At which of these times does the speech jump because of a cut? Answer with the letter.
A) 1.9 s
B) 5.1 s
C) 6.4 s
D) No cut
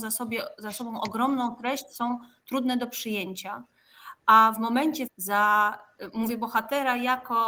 B